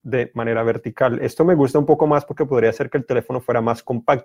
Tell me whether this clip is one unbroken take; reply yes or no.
yes